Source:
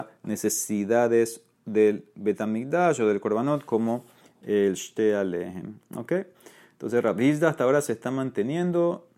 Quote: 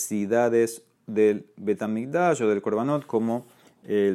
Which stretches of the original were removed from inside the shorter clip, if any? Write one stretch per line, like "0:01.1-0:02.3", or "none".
none